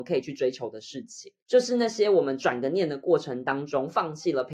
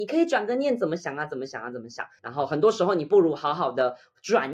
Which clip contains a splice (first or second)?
second